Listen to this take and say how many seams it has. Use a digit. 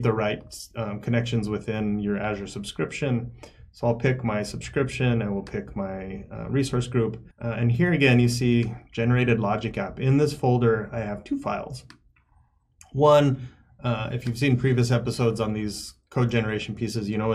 1